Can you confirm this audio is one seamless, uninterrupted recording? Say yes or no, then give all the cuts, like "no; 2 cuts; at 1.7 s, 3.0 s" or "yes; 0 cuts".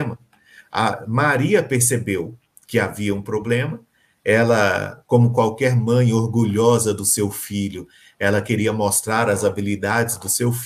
yes; 0 cuts